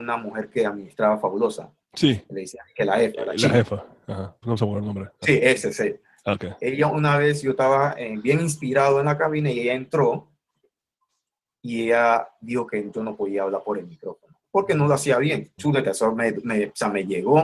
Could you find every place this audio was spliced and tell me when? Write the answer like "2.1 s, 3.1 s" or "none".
4.4 s, 15.6 s

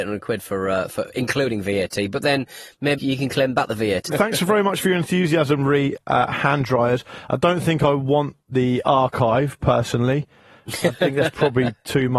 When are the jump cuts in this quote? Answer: 3.0 s, 4.1 s

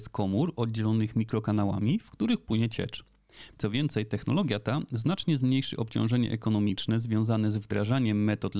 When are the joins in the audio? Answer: 3.5 s

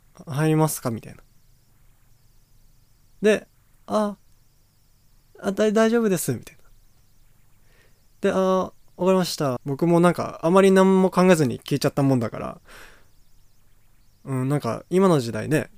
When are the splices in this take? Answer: 9.6 s

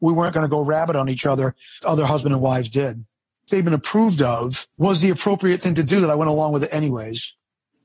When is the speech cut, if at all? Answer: 1.8 s, 3.5 s, 4.7 s

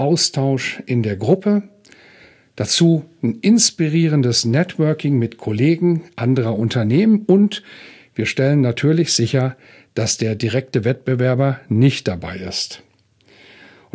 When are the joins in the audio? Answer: none

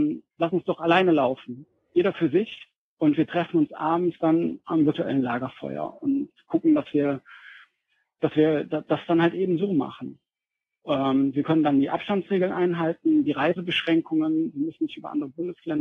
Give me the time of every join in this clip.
none

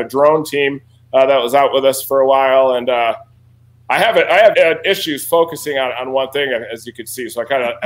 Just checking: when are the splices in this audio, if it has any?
4.5 s

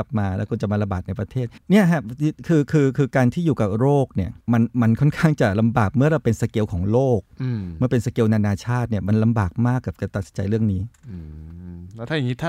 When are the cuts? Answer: 1.6 s, 4.4 s

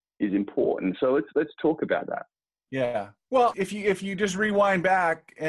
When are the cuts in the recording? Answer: 3.5 s

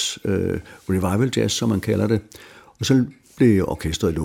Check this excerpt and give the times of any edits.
none

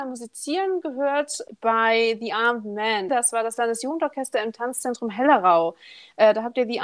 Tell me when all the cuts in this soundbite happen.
3.1 s

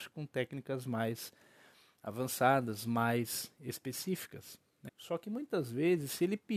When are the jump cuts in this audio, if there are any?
4.9 s

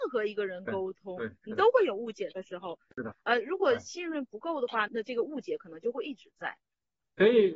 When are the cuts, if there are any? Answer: 3.1 s, 4.9 s

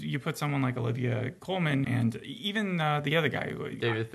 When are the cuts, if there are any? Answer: 1.8 s

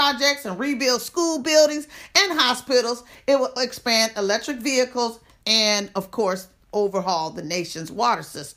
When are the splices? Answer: 3.6 s, 5.4 s

